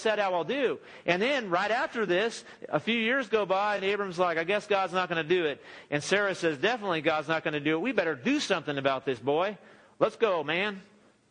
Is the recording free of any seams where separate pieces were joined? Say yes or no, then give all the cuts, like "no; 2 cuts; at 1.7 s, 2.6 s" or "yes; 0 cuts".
yes; 0 cuts